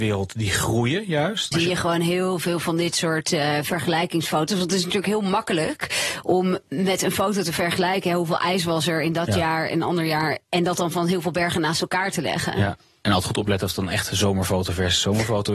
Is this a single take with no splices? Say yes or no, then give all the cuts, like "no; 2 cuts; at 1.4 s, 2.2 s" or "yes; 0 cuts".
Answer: no; 1 cut; at 1.5 s